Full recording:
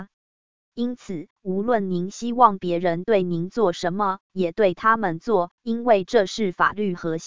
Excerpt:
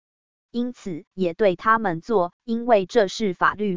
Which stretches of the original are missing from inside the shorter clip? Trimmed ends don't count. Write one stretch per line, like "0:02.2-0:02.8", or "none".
0:01.3-0:04.2